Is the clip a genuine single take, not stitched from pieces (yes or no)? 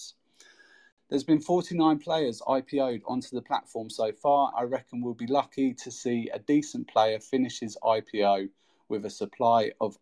no